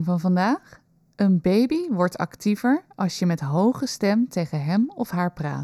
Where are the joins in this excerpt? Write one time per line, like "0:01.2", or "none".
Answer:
none